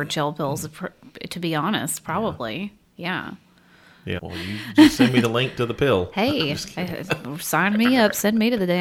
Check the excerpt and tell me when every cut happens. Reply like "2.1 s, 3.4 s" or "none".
4.2 s

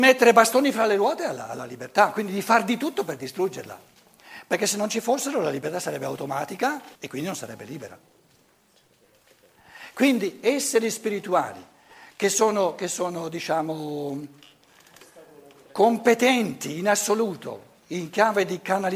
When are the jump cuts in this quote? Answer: 7.0 s

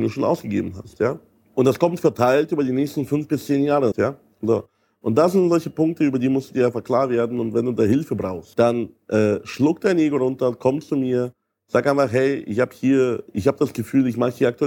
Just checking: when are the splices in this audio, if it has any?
3.9 s

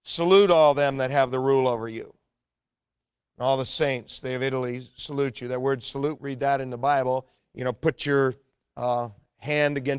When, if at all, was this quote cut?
6.2 s, 7.4 s

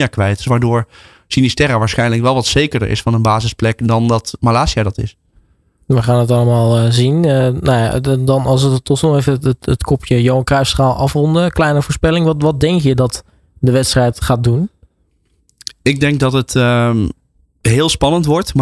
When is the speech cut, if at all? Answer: 9.6 s

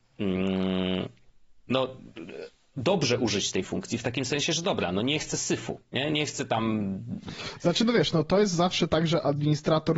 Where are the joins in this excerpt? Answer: none

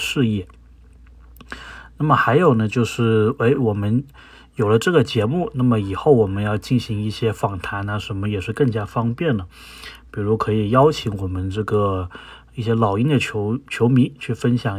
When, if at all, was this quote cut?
none

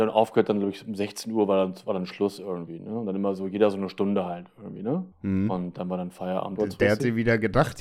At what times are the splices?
5.1 s, 6.6 s

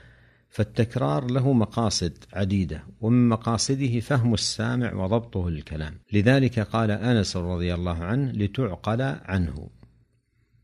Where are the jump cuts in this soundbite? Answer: 6.0 s

